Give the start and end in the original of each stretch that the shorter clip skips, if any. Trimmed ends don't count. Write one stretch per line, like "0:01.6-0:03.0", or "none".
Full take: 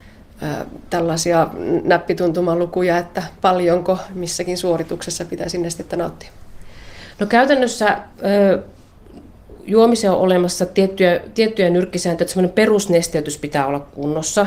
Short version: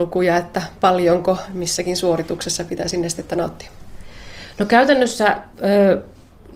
none